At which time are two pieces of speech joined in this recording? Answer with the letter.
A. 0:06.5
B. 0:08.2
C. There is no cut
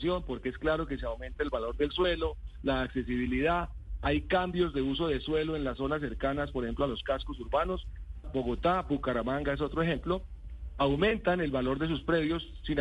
B